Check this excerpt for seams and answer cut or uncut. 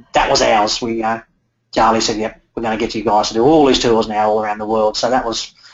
uncut